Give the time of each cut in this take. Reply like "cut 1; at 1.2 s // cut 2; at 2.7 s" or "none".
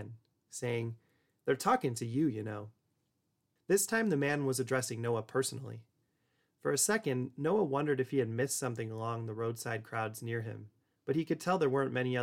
cut 1; at 3.6 s